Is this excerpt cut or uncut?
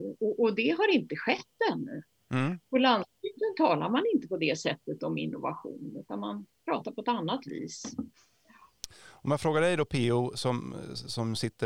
uncut